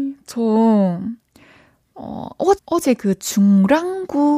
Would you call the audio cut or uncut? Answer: cut